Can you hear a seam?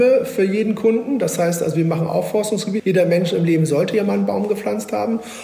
yes; 1 cut; at 2.8 s

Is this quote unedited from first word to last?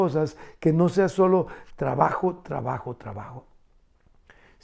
yes; 0 cuts

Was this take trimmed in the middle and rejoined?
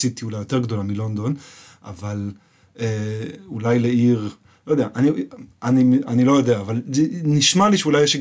no; 0 cuts

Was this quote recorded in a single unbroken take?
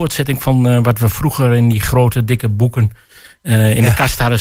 yes; 0 cuts

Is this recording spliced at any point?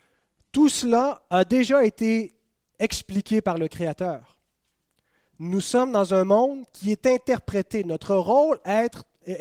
no; 0 cuts

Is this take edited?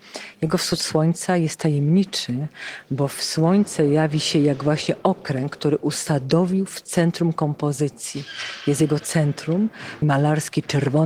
yes; 1 cut; at 10.0 s

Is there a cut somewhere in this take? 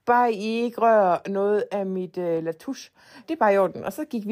yes; 1 cut; at 3.2 s

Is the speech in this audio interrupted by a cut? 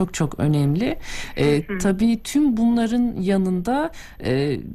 no; 0 cuts

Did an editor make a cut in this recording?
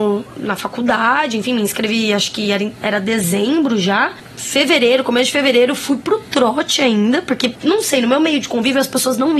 no; 0 cuts

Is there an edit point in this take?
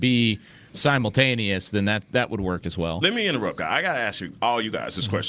no; 0 cuts

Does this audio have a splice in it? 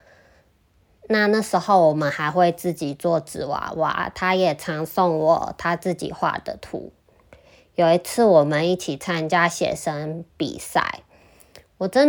no; 0 cuts

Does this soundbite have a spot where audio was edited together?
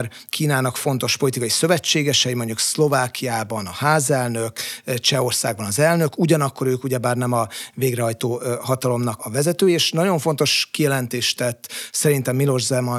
yes; 1 cut; at 9.2 s

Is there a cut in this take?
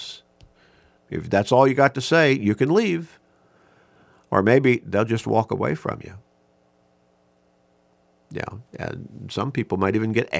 yes; 1 cut; at 1.0 s

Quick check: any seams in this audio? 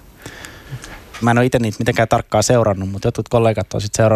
yes; 1 cut; at 1.2 s

